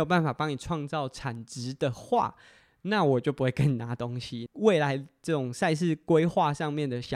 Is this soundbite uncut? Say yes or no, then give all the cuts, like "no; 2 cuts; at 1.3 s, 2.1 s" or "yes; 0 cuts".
no; 1 cut; at 4.5 s